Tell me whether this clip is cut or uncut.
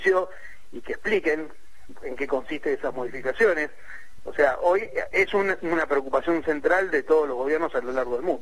uncut